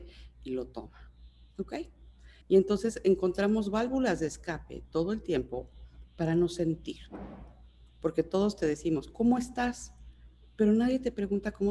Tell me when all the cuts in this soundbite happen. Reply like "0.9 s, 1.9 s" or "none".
2.4 s